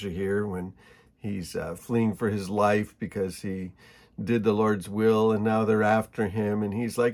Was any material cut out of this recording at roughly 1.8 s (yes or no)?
yes